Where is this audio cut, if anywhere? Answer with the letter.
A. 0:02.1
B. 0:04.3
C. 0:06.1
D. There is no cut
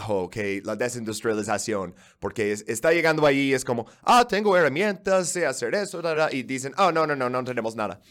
C